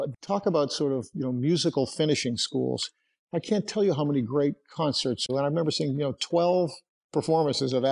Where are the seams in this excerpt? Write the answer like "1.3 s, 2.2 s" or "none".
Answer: 5.3 s